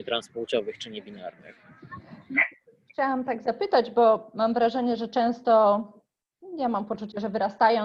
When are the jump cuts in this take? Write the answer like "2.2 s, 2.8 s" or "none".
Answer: none

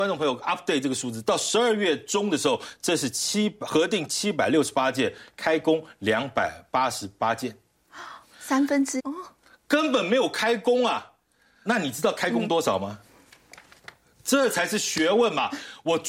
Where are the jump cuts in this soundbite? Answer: 9.0 s, 11.7 s

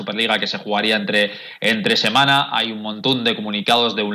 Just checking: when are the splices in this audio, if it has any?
none

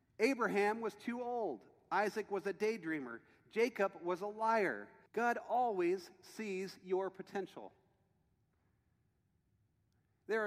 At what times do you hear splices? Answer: 5.1 s

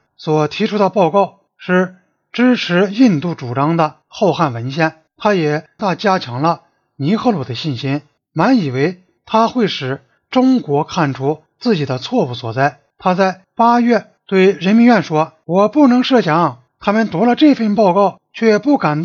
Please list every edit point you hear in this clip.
5.8 s

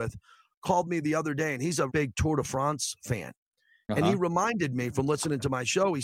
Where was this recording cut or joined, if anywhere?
1.9 s

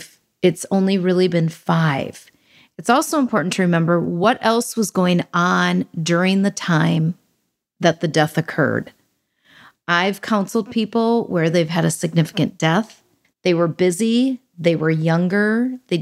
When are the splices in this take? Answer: 2.7 s, 13.2 s

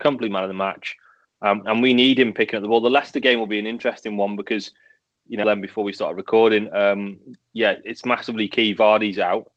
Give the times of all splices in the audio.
5.4 s

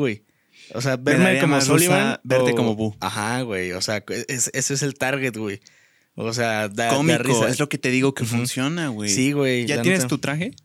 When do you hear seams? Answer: none

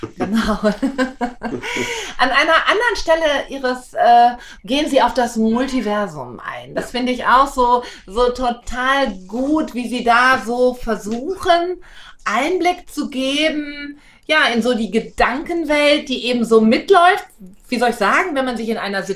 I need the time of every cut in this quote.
4.6 s

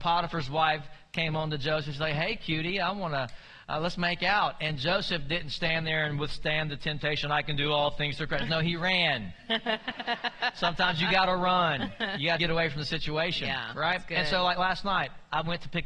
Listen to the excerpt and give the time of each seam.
12.4 s

